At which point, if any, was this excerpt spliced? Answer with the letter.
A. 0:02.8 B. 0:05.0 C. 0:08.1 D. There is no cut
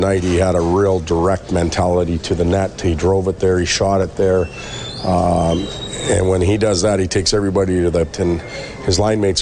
C